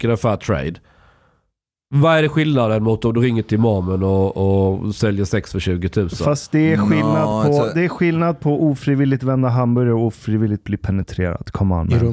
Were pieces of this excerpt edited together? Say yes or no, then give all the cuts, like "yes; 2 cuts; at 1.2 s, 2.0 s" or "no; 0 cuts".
no; 0 cuts